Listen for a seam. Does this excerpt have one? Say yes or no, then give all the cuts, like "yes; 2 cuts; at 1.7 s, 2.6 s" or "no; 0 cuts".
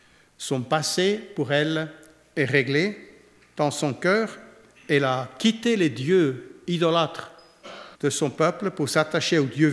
yes; 1 cut; at 7.9 s